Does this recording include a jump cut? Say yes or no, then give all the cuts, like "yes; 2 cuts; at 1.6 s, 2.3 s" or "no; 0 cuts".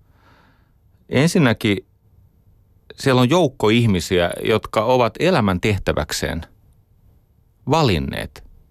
no; 0 cuts